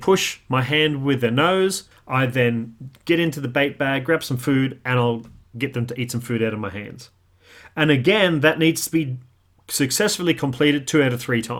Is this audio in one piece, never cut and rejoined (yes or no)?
no